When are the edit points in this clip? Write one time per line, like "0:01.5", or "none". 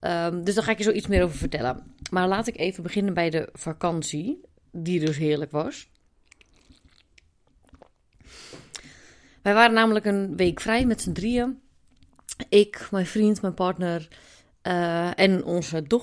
none